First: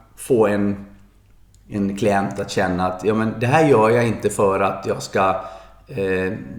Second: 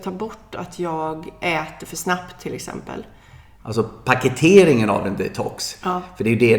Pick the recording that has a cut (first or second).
second